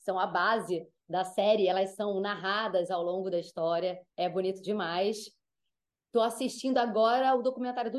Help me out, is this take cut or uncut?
cut